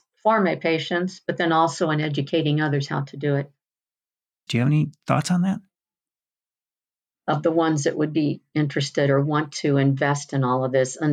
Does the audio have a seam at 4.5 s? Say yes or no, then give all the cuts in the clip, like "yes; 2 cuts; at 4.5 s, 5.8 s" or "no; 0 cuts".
yes; 2 cuts; at 4.5 s, 7.1 s